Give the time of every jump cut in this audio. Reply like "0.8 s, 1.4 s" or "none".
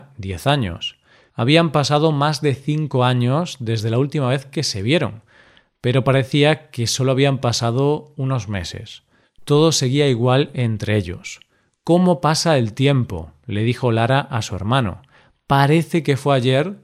1.3 s